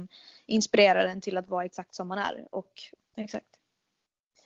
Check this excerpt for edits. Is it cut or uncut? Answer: cut